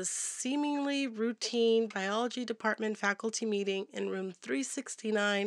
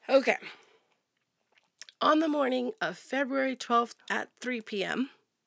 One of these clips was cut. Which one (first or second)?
second